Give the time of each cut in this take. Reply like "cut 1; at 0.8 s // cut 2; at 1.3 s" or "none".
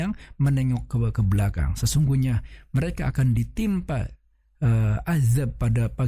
none